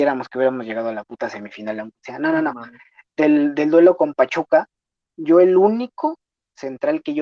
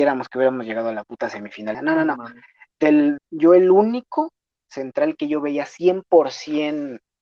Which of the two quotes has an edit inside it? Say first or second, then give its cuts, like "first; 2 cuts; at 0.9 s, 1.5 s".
second; 2 cuts; at 1.7 s, 3.2 s